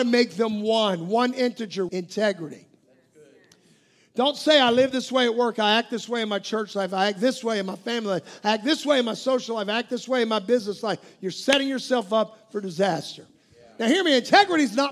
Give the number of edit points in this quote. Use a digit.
1